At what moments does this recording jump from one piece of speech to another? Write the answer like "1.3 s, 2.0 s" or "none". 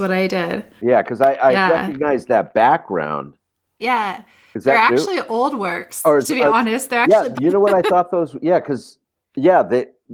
3.8 s, 7.3 s

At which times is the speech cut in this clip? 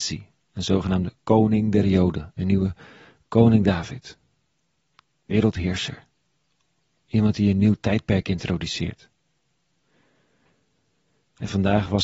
none

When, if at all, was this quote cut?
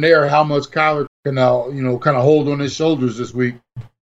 1.1 s

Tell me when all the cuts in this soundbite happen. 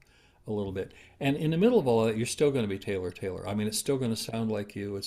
none

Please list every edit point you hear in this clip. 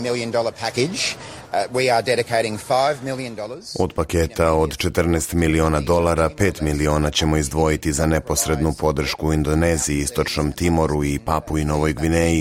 none

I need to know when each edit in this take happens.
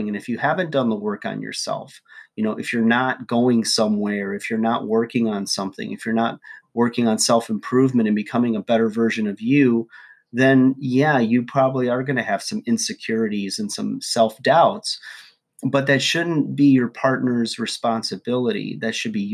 none

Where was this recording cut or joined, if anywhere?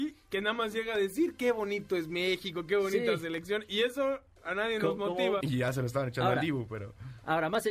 5.4 s

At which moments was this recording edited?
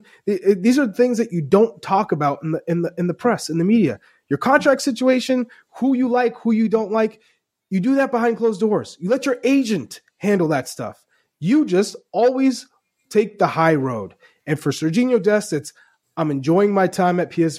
none

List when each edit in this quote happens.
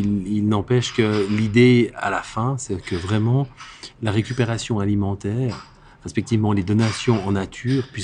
none

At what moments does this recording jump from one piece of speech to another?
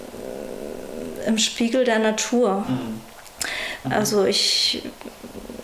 2.6 s, 3.8 s

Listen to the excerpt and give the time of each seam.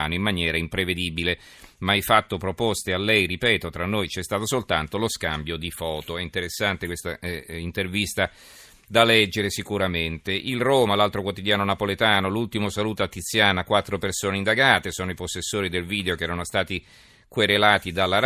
none

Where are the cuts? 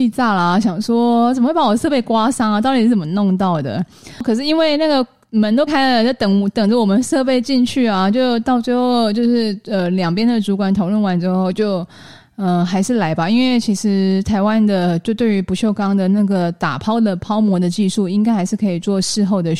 5.7 s

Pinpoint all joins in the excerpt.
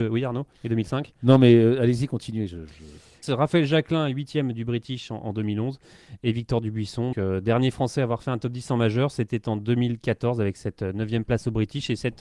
3.2 s, 7.1 s

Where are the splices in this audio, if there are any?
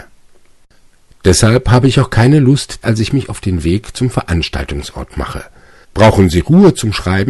2.8 s, 5.8 s

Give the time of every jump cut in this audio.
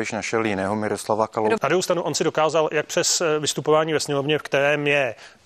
1.6 s

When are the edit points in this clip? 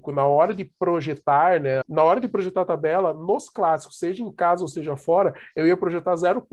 1.8 s

